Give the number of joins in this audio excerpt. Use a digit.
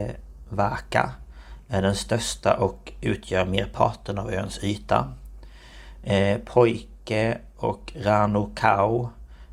0